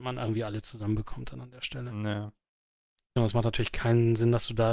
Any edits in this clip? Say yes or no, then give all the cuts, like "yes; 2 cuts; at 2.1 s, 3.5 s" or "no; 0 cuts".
yes; 1 cut; at 3.2 s